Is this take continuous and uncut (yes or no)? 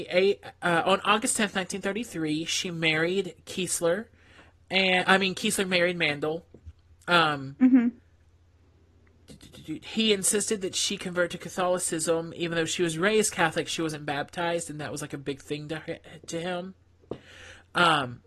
yes